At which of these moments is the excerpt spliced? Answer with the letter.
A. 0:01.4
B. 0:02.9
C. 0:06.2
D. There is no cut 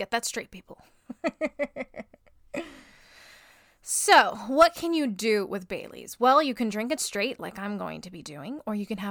D